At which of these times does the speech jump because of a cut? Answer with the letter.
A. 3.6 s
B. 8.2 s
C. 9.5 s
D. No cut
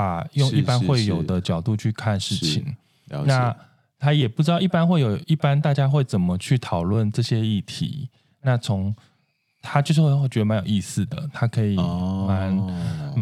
D